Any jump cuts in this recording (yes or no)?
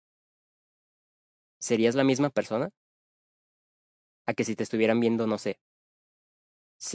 no